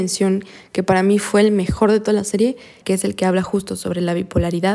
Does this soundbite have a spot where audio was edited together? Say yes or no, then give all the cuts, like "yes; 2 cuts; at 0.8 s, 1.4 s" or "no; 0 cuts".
yes; 1 cut; at 2.8 s